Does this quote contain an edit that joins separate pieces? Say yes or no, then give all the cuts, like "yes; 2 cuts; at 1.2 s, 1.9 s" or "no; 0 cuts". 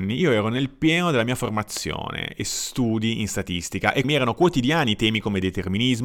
yes; 1 cut; at 4.0 s